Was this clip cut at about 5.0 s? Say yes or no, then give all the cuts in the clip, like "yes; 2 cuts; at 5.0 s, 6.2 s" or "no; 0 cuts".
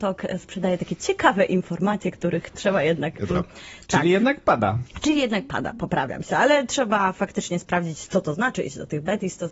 no; 1 cut; at 3.3 s